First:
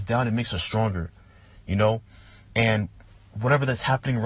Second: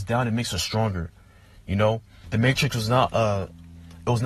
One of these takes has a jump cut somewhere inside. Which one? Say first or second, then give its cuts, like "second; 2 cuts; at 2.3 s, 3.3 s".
second; 1 cut; at 2.2 s